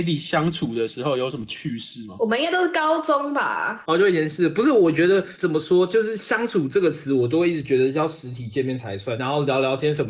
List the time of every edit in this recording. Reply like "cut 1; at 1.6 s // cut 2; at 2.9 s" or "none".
cut 1; at 9.2 s